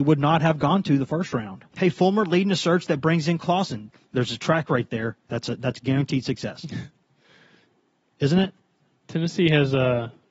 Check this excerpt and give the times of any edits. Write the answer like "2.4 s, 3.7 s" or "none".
1.7 s

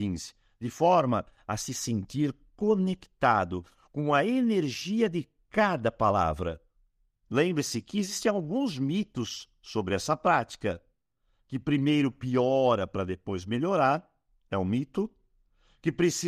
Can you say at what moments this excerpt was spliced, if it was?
7.2 s

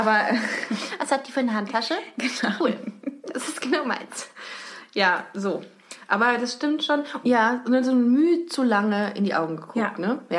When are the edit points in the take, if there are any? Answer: 2.6 s, 7.2 s

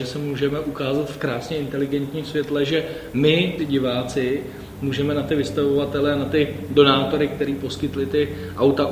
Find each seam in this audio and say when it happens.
3.6 s

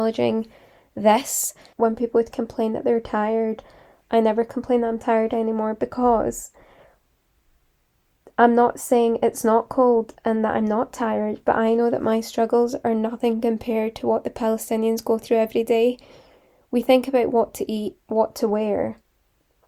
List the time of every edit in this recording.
1.7 s

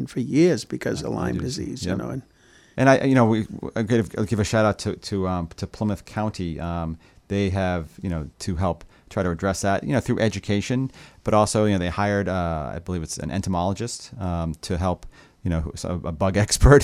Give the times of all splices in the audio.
2.7 s, 8.3 s

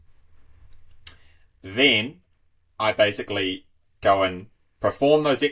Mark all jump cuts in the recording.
none

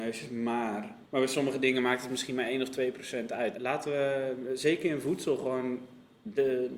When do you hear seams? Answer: 1.0 s, 3.5 s

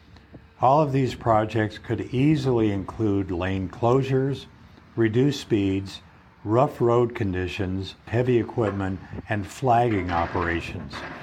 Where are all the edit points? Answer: 8.1 s

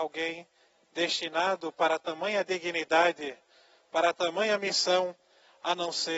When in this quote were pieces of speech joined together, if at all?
none

